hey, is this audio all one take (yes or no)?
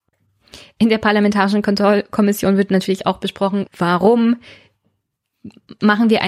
no